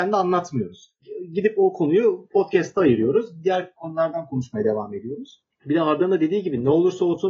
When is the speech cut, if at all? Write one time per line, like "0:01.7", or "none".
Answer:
none